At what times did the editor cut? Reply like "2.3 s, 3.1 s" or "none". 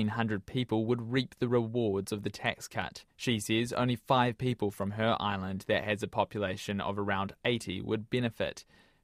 3.1 s